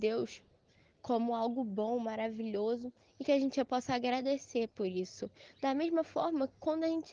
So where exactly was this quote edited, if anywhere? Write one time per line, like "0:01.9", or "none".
none